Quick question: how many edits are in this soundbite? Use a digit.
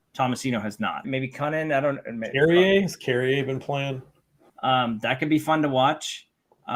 2